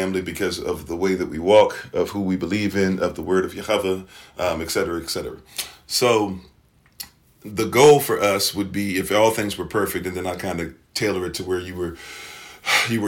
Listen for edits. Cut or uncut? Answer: uncut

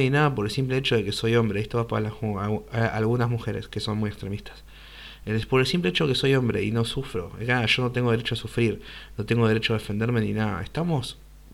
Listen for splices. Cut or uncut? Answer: uncut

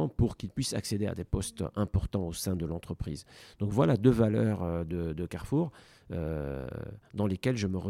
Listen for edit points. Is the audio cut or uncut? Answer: uncut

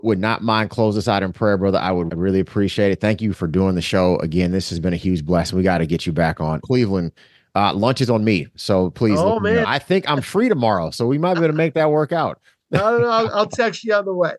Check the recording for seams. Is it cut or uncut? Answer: cut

